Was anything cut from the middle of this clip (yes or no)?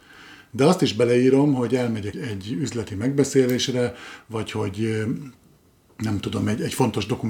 yes